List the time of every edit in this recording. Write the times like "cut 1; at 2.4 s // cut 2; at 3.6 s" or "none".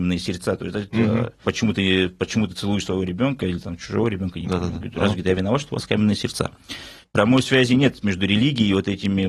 cut 1; at 1.4 s